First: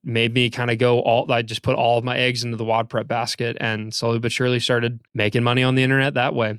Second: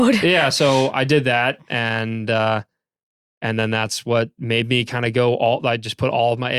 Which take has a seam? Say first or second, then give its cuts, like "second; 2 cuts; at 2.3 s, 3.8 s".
first; 1 cut; at 5.0 s